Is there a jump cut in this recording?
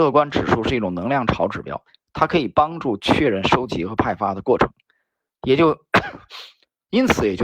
no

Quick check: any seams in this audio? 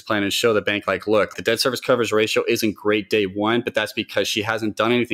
yes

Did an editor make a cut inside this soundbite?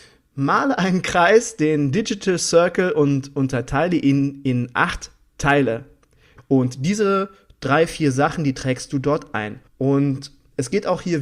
yes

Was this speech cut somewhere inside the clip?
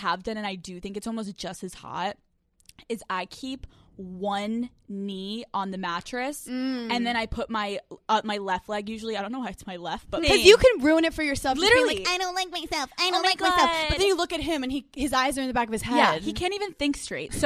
yes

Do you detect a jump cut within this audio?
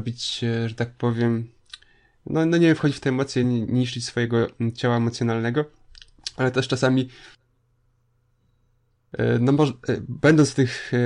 no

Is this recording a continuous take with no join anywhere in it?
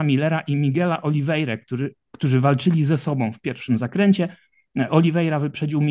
yes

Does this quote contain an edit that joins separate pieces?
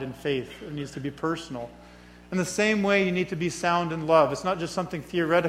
no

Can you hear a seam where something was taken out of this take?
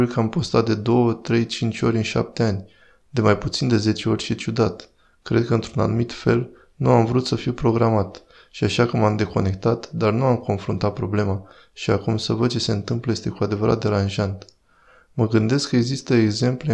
no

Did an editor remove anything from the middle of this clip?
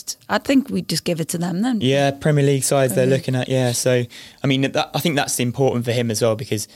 yes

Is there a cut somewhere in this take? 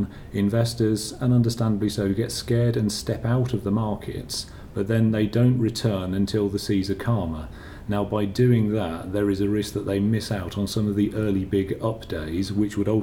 no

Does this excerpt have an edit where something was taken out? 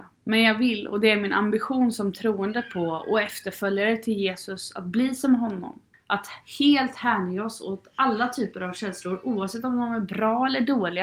yes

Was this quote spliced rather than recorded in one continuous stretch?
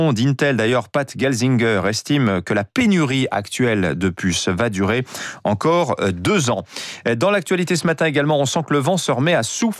no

